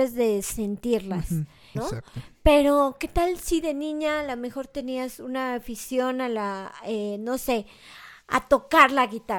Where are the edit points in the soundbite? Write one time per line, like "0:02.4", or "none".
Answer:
0:01.8